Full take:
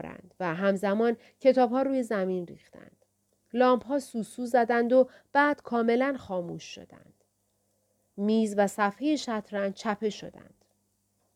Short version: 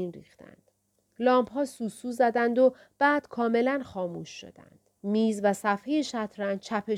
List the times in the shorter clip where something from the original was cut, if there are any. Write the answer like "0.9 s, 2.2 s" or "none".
5.0 s